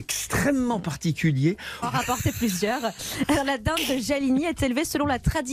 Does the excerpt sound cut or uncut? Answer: cut